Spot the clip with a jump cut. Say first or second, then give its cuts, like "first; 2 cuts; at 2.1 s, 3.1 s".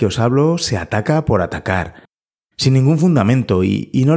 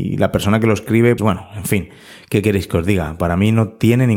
second; 1 cut; at 1.2 s